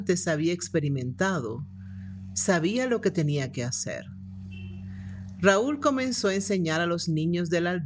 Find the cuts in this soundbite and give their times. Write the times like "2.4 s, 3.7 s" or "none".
none

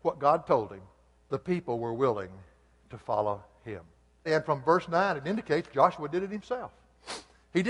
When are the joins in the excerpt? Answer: 1.2 s, 4.3 s

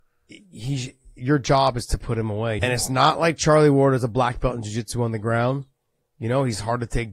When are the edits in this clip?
2.6 s

